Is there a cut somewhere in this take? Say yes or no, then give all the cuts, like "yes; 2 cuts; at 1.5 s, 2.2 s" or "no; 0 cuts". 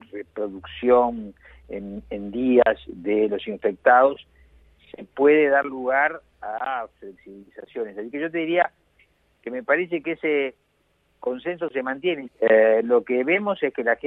yes; 1 cut; at 12.3 s